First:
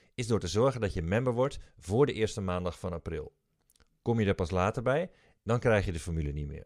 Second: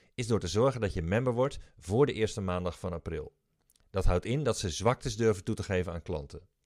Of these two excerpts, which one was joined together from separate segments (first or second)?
second